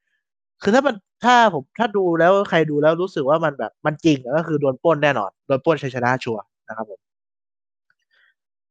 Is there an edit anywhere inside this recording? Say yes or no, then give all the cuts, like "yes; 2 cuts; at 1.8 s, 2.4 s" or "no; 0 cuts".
no; 0 cuts